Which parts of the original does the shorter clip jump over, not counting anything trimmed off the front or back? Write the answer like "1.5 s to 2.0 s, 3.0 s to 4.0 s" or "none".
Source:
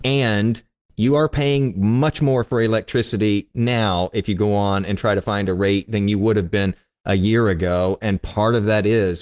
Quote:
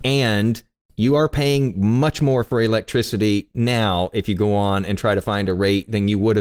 none